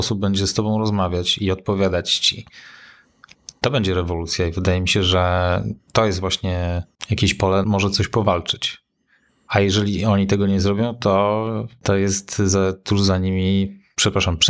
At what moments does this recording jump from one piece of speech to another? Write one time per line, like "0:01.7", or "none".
0:07.6